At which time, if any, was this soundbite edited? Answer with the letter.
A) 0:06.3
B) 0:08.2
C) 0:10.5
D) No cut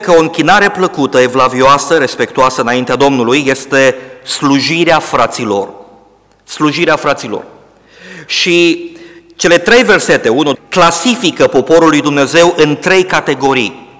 C